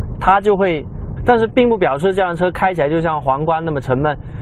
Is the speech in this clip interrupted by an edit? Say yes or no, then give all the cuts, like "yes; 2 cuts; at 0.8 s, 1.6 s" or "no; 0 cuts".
yes; 1 cut; at 1.2 s